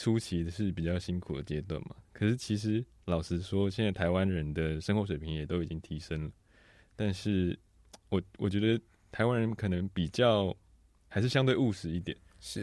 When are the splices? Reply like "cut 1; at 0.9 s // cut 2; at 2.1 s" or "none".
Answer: none